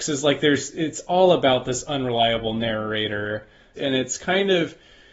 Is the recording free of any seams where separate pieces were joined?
no; 1 cut; at 3.8 s

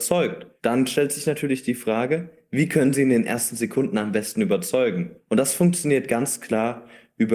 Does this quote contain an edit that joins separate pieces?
no; 0 cuts

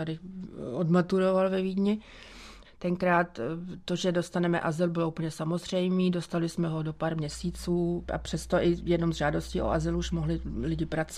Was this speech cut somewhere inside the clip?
yes; 1 cut; at 2.6 s

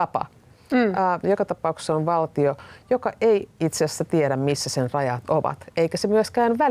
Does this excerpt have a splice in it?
yes; 1 cut; at 1.2 s

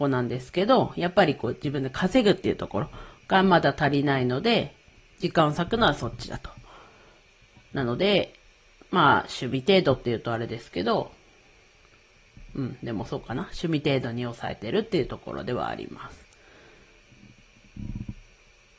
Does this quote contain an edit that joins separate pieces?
no; 0 cuts

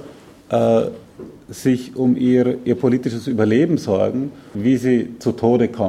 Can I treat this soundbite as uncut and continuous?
no; 1 cut; at 4.5 s

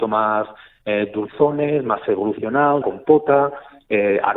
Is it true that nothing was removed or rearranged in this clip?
no; 1 cut; at 2.8 s

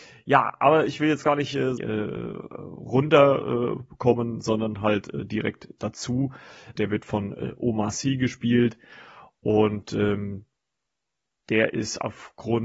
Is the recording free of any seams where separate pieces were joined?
no; 2 cuts; at 1.8 s, 6.8 s

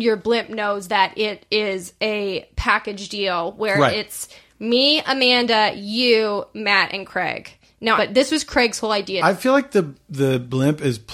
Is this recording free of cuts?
no; 1 cut; at 8.0 s

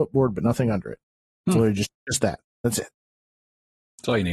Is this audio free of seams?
yes; 0 cuts

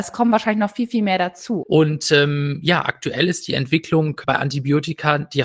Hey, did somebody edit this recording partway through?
yes; 2 cuts; at 1.6 s, 4.2 s

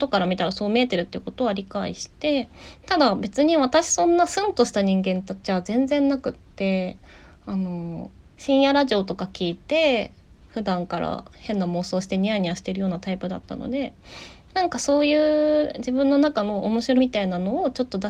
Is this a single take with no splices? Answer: no; 1 cut; at 17.0 s

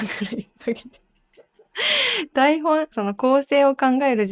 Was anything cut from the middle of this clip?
yes; 1 cut; at 2.9 s

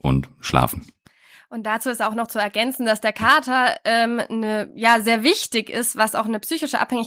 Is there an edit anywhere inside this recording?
no; 0 cuts

